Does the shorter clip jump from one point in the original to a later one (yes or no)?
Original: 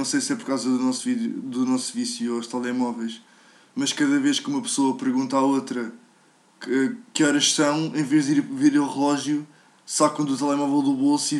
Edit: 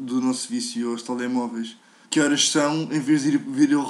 yes